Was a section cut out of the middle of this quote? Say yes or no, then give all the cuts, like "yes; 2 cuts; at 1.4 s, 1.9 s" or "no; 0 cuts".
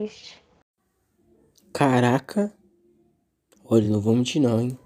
no; 0 cuts